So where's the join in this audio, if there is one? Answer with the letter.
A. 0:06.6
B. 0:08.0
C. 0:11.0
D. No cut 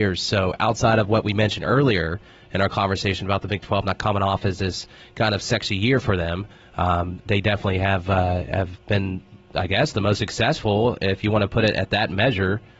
D